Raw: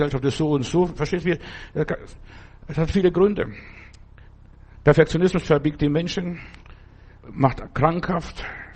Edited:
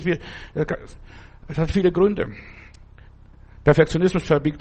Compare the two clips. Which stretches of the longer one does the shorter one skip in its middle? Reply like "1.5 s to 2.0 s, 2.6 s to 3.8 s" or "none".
none